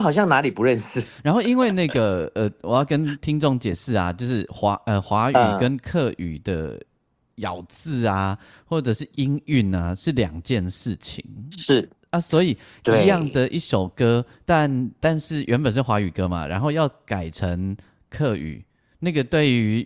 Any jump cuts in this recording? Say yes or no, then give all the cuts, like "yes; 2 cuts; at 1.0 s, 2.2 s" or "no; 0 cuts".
no; 0 cuts